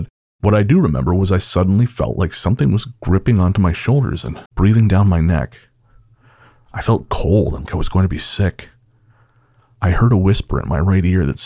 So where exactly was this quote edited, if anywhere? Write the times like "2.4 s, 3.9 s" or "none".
4.5 s, 7.7 s